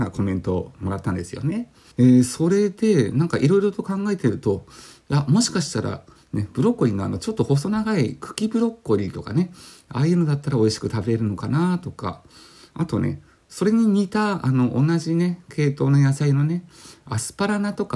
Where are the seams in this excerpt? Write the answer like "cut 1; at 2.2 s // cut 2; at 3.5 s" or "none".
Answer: cut 1; at 1.9 s